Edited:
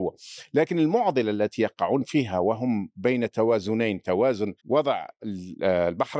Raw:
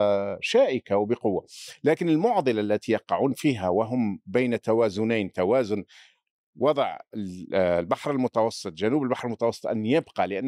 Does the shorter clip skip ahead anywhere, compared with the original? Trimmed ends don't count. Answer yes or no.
yes